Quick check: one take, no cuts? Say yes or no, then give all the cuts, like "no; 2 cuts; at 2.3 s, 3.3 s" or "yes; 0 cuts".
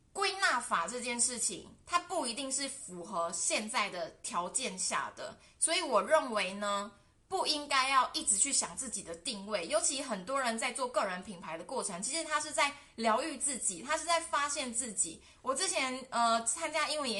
yes; 0 cuts